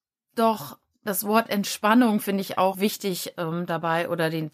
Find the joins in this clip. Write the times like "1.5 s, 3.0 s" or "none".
2.7 s